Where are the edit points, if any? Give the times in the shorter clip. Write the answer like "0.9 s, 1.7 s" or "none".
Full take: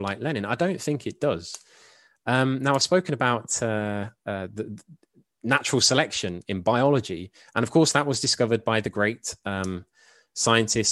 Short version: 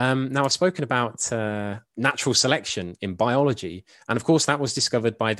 1.9 s